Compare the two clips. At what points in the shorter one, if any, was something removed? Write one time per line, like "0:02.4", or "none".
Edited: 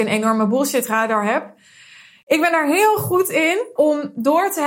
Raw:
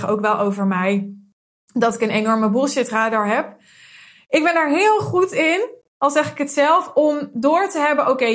0:03.8